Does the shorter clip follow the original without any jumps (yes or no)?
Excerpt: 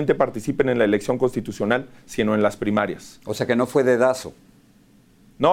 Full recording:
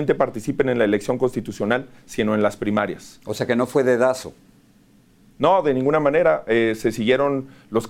yes